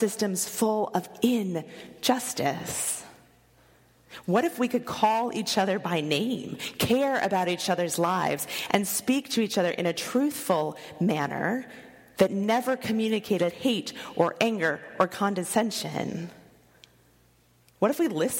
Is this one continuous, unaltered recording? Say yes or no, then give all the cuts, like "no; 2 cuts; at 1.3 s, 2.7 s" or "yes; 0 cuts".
yes; 0 cuts